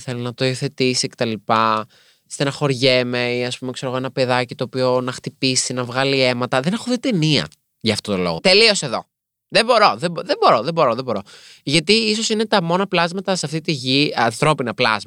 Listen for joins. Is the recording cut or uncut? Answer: cut